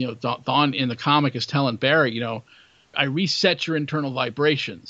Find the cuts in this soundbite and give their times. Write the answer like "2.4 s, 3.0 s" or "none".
2.9 s